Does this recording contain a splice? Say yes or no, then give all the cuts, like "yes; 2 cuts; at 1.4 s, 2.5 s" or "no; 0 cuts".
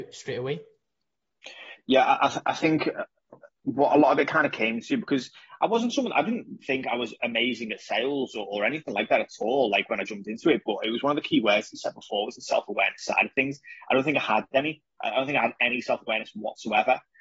yes; 1 cut; at 6.6 s